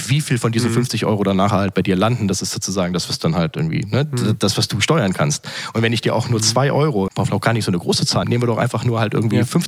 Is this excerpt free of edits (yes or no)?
no